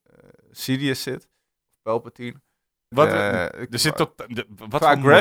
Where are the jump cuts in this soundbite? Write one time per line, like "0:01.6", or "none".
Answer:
0:02.9